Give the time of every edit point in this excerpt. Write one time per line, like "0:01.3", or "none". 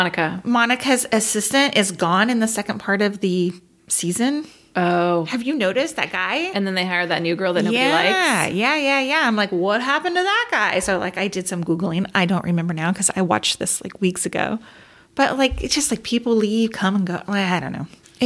none